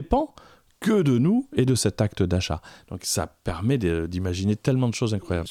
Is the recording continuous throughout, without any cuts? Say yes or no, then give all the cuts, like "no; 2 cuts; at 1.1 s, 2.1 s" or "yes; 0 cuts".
yes; 0 cuts